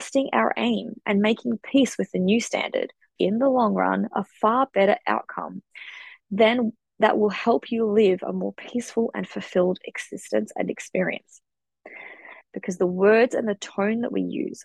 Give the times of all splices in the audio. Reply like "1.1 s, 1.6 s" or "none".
3.2 s, 12.4 s